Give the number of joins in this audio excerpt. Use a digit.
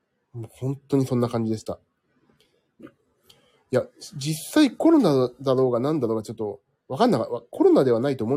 1